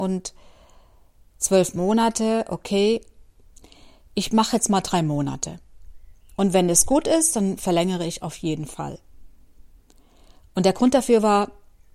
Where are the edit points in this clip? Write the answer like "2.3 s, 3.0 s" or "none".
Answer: none